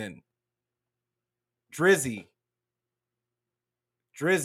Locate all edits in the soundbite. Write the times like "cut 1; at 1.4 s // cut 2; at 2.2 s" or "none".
none